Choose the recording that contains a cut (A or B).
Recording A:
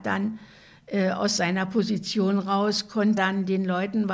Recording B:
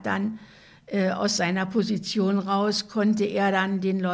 A